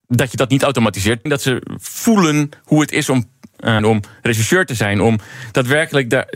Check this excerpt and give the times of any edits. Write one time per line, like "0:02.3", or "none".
0:01.3
0:03.8